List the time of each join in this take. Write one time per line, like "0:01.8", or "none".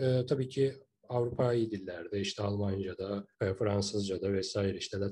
0:03.3